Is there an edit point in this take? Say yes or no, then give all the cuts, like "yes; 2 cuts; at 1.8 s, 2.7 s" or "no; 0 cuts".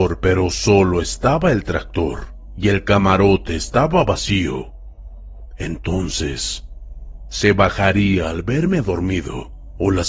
no; 0 cuts